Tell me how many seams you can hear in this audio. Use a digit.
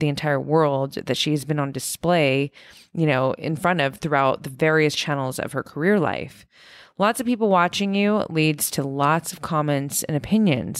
0